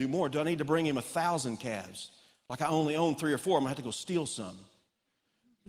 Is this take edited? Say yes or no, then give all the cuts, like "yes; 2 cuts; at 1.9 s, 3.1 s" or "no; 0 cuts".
no; 0 cuts